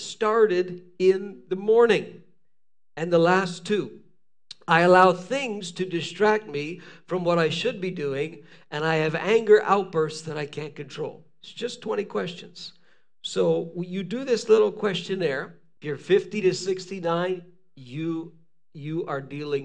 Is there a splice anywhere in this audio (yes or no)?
yes